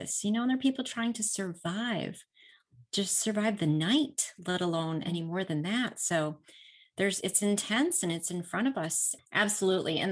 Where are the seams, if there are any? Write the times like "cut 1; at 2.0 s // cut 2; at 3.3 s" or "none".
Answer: cut 1; at 7.2 s // cut 2; at 9.2 s

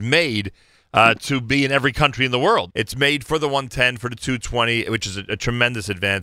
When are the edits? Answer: cut 1; at 2.7 s

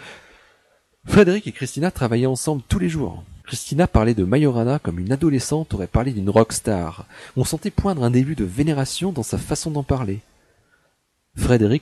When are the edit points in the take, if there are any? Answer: cut 1; at 3.4 s

